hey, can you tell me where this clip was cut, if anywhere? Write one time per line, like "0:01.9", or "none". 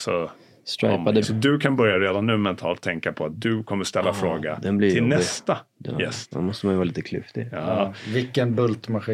0:01.2